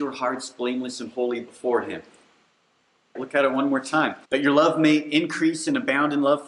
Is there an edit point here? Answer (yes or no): yes